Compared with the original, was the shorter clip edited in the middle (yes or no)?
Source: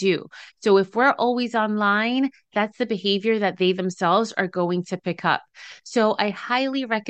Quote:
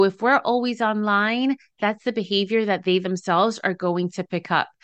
no